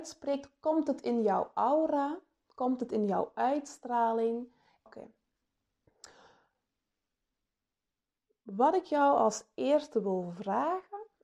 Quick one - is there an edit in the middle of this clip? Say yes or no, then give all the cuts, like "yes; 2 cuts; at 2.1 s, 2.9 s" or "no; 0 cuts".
yes; 1 cut; at 4.9 s